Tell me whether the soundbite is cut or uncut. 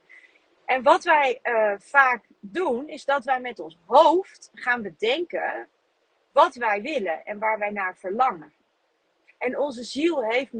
cut